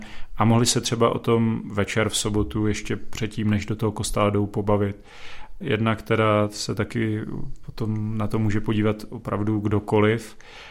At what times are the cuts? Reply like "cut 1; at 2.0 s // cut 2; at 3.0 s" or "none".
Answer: cut 1; at 5.6 s